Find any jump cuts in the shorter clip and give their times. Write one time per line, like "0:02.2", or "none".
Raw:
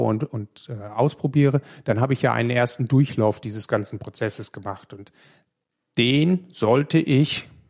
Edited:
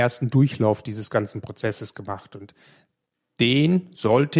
none